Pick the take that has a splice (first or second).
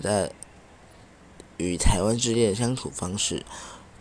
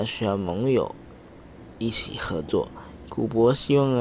second